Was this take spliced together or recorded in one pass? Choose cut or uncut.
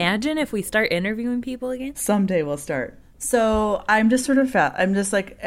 cut